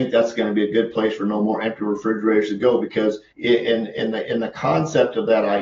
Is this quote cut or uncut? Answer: cut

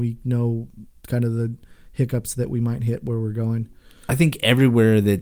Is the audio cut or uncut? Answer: uncut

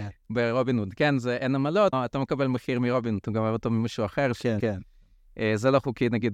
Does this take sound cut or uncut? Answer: cut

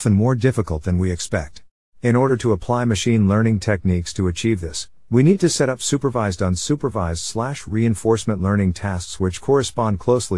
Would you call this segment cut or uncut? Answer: cut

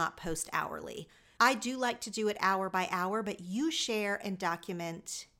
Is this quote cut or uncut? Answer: cut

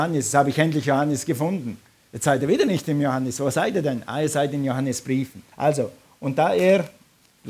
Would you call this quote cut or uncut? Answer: cut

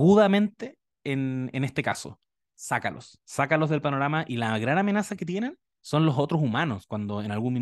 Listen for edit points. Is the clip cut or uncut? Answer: uncut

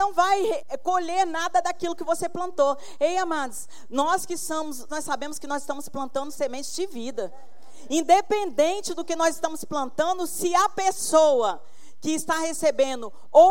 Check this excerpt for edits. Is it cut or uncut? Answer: cut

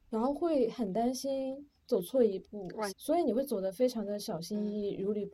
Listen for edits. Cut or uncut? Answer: cut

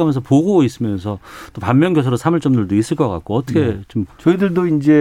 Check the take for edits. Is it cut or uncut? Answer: cut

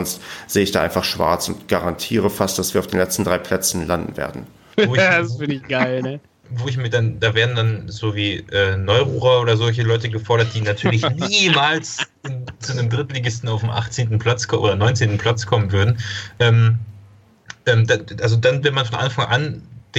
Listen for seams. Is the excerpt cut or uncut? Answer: cut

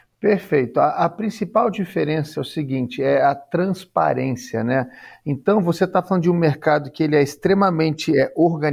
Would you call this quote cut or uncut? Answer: cut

